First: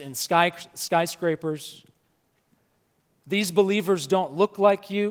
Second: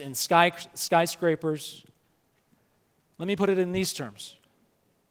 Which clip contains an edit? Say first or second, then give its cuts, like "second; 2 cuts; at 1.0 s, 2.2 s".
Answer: second; 1 cut; at 3.1 s